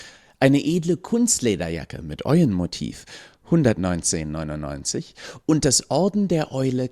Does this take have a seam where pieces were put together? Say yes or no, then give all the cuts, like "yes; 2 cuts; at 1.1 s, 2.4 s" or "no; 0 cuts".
yes; 1 cut; at 5.4 s